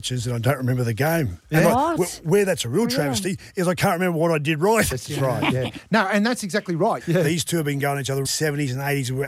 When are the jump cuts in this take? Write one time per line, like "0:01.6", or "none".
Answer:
0:04.9
0:07.0
0:08.2